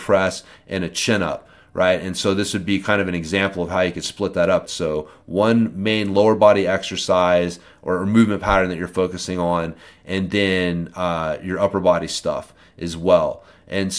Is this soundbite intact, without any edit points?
no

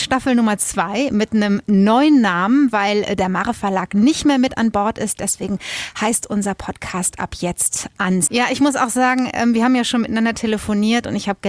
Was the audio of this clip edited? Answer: yes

